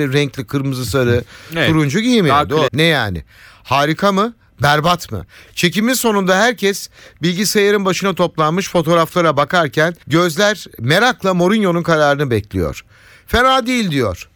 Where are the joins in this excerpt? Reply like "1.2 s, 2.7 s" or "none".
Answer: 2.7 s, 5.5 s, 10.0 s